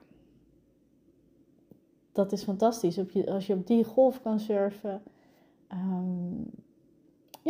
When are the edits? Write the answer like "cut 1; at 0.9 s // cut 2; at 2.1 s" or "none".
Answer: none

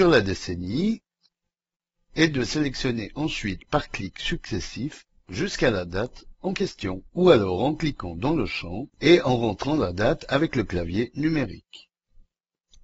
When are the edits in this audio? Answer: cut 1; at 7.1 s // cut 2; at 8.9 s

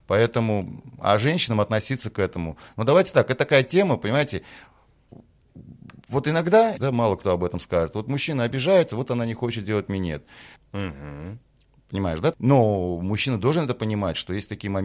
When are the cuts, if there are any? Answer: cut 1; at 6.8 s // cut 2; at 10.6 s // cut 3; at 12.3 s

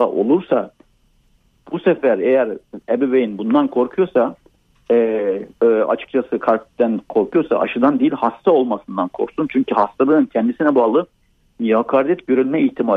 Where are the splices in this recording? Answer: cut 1; at 5.6 s

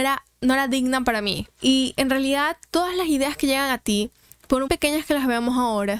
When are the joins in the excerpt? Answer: cut 1; at 1.5 s // cut 2; at 4.7 s

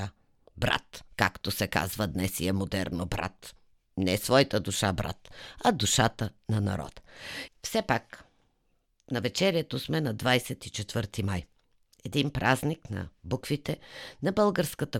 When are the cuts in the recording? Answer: cut 1; at 7.5 s

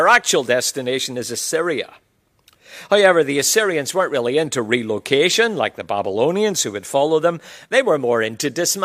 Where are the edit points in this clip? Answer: none

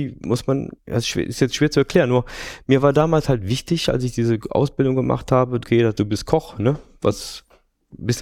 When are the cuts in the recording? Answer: cut 1; at 5.6 s

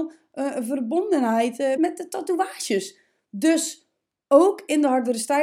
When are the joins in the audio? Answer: cut 1; at 1.8 s

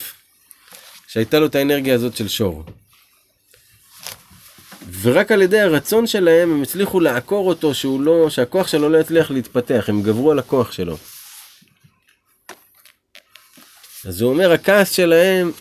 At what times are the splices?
cut 1; at 14.0 s

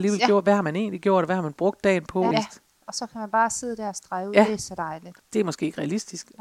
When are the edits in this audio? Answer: cut 1; at 2.3 s // cut 2; at 5.2 s

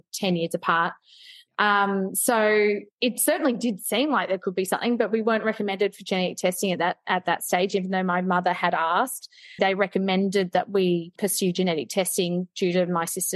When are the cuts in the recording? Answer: cut 1; at 9.6 s

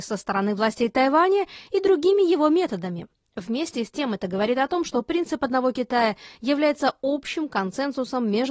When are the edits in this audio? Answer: none

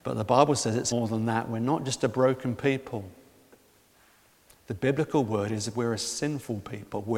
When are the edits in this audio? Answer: cut 1; at 0.9 s

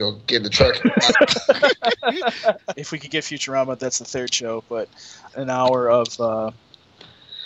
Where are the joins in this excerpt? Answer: cut 1; at 2.7 s // cut 2; at 5.3 s

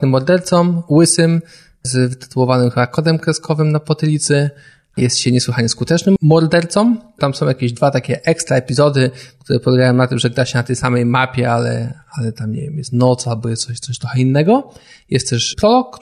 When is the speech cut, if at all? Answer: cut 1; at 7.2 s

